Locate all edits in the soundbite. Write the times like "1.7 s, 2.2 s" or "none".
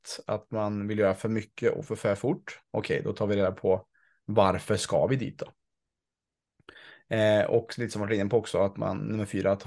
2.6 s